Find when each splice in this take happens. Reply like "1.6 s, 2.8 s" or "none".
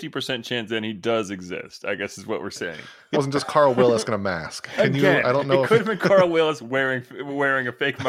3.1 s